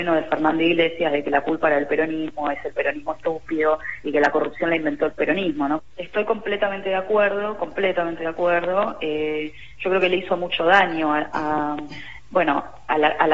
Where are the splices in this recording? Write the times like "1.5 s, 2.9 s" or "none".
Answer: 5.8 s